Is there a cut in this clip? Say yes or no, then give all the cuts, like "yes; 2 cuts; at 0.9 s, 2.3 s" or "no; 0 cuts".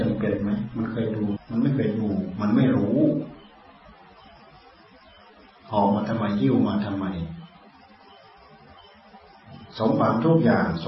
yes; 1 cut; at 1.4 s